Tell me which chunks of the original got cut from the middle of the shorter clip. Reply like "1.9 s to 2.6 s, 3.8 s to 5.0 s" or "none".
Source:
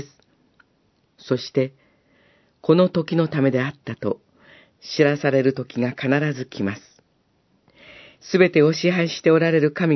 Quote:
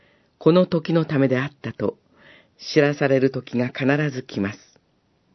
none